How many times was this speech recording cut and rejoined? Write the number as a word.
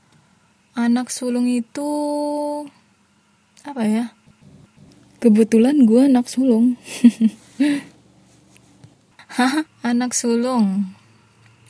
one